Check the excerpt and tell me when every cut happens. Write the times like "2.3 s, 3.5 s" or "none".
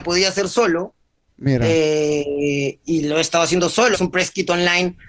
2.8 s, 3.9 s